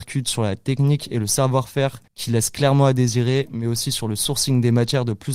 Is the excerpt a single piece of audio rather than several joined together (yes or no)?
yes